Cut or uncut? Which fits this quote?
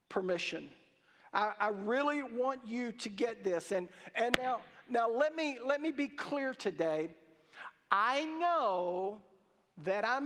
uncut